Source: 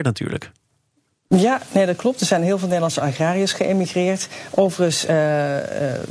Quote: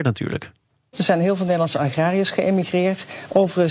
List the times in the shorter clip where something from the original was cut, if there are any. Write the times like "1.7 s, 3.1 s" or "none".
0.9 s